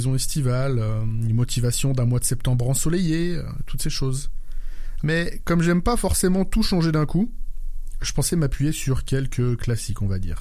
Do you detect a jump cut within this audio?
yes; 1 cut; at 5.0 s

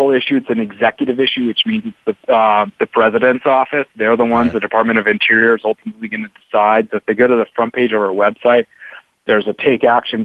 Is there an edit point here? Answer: no; 0 cuts

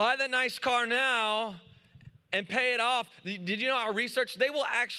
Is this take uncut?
yes; 0 cuts

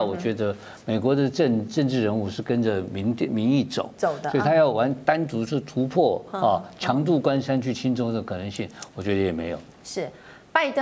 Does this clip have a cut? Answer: no; 0 cuts

